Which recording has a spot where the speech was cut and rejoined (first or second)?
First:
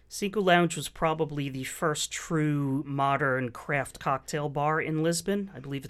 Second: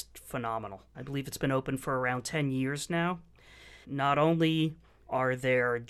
second